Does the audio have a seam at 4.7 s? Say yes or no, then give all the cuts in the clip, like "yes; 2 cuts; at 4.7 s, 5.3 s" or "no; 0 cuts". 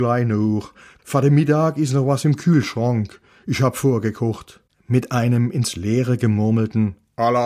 no; 1 cut; at 1.0 s